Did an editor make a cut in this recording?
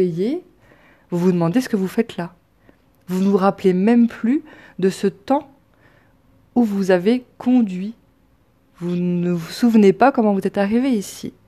no; 0 cuts

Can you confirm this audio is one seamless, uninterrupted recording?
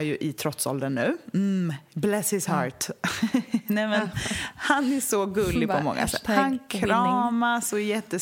yes; 0 cuts

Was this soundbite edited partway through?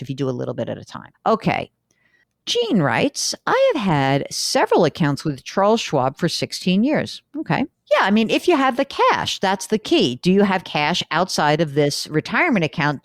yes; 2 cuts; at 1.1 s, 7.7 s

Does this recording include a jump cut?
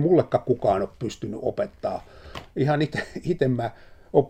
no; 0 cuts

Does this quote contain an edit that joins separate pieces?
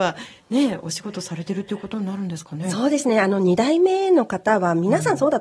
no; 0 cuts

